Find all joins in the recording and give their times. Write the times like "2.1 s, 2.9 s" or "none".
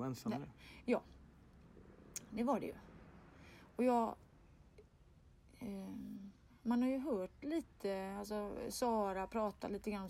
none